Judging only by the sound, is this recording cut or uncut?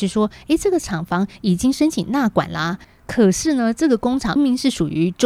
cut